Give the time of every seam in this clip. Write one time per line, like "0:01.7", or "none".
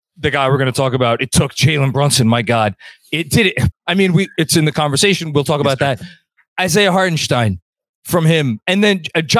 0:03.7